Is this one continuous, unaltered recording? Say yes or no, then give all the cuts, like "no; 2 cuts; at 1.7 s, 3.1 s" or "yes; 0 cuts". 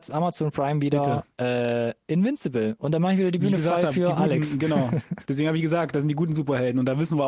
yes; 0 cuts